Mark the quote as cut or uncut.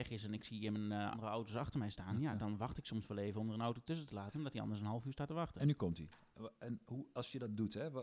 cut